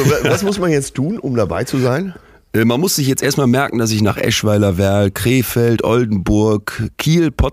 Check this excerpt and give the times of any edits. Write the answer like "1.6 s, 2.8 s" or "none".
none